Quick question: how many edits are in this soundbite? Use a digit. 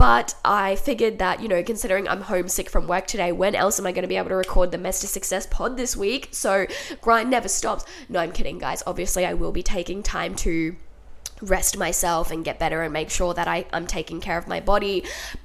0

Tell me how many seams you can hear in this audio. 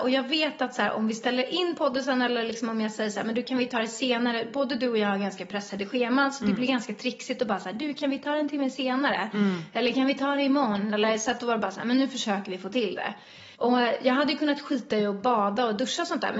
1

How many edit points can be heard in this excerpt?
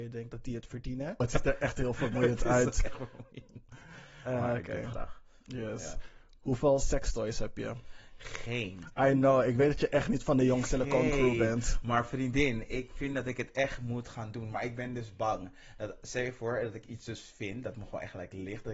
1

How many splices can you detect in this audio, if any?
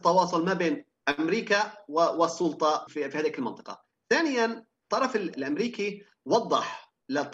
1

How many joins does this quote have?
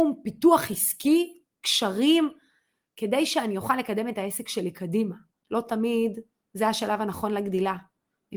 1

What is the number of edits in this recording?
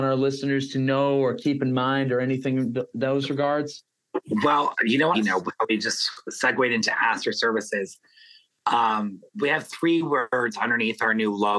2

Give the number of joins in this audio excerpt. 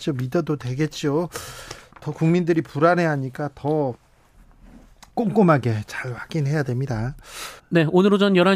1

